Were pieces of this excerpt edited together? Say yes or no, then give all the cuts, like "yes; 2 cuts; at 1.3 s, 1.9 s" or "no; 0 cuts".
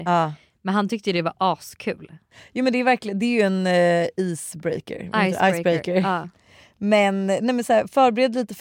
no; 0 cuts